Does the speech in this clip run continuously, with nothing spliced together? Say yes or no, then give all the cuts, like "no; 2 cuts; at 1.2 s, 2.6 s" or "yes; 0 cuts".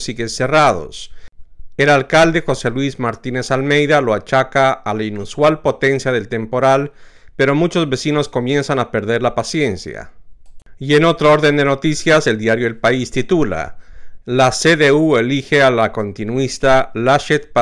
yes; 0 cuts